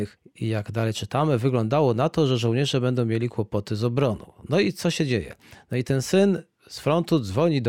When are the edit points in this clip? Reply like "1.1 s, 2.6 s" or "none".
none